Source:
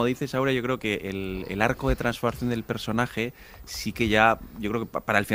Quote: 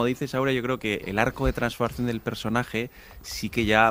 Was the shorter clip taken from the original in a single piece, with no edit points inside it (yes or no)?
no